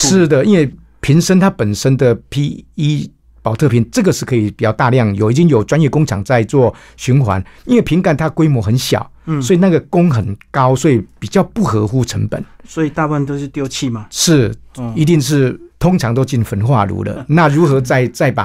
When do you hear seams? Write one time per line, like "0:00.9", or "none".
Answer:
0:15.7

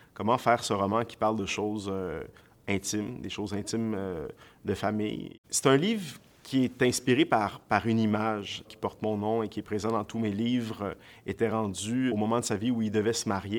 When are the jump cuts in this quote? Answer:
0:05.4
0:08.6
0:12.1

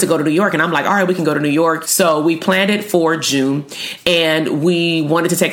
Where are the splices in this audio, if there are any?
0:01.8

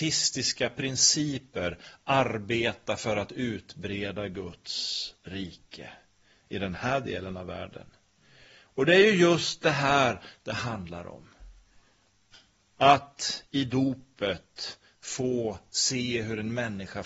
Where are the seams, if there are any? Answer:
none

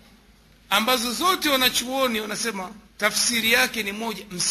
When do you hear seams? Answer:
0:02.9

